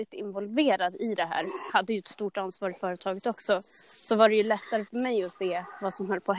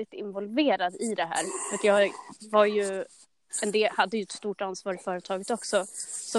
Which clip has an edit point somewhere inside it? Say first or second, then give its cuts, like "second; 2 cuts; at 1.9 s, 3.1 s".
first; 1 cut; at 1.7 s